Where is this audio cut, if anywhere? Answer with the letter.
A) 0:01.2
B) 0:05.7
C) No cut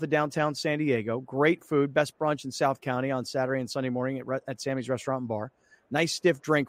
C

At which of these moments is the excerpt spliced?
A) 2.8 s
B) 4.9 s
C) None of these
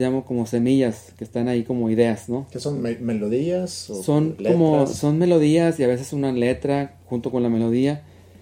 C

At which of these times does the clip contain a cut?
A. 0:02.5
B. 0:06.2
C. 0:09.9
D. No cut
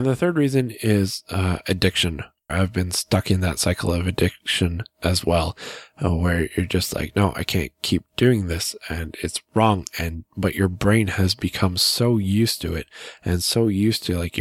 A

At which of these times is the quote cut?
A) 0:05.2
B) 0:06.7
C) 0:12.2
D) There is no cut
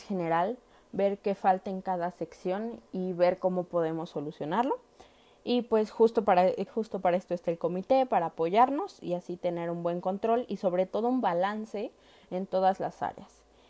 B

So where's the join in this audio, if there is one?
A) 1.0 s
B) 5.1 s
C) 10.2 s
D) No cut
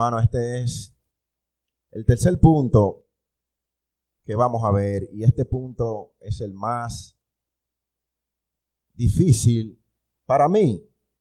D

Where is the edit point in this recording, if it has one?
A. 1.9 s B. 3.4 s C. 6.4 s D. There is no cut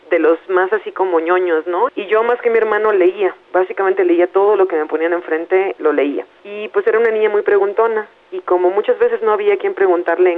A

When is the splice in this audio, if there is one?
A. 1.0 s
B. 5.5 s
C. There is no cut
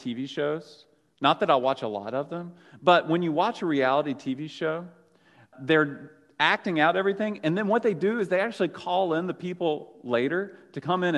B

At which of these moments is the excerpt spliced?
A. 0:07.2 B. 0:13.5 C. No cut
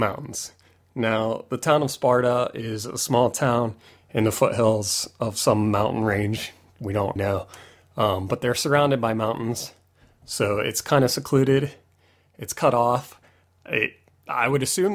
A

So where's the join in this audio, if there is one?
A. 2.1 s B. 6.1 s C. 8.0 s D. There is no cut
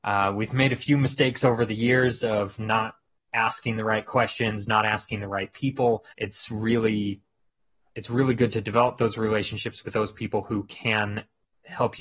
B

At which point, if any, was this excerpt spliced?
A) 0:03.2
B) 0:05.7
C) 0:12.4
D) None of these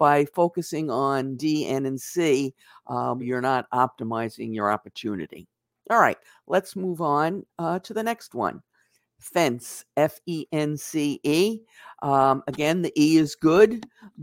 A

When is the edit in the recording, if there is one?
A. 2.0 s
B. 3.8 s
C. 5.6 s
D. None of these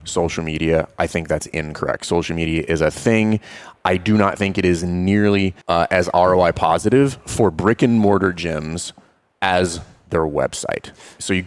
C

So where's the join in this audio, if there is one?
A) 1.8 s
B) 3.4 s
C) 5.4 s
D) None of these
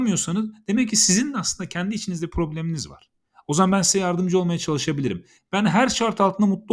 C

